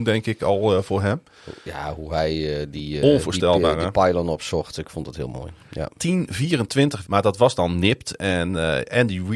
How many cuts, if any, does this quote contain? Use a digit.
1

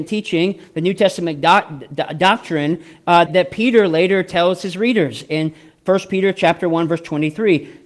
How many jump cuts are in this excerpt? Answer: 1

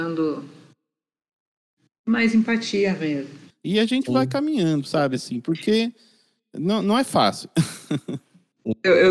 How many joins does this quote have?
1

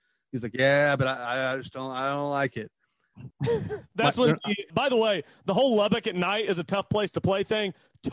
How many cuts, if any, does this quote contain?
2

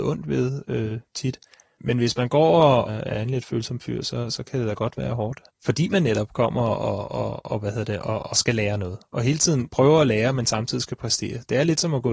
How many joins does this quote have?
1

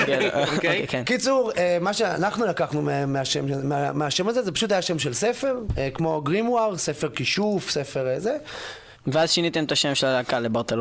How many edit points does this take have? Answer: 1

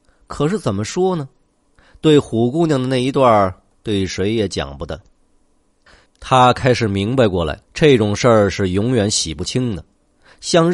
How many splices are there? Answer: 2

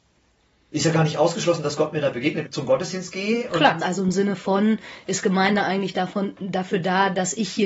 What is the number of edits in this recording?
2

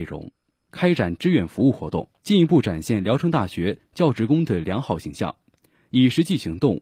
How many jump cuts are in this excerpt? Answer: 1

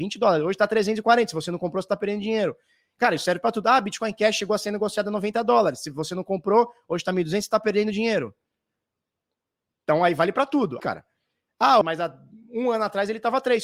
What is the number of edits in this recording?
2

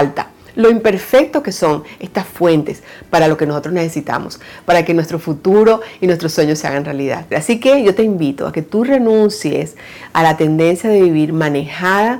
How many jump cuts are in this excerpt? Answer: 1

